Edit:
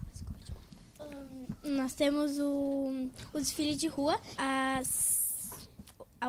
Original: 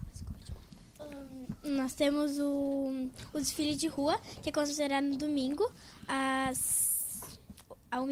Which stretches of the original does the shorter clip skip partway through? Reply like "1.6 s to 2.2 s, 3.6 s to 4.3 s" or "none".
4.3 s to 6.1 s